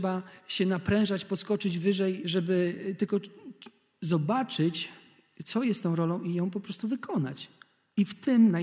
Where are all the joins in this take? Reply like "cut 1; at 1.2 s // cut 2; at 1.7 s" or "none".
cut 1; at 2.2 s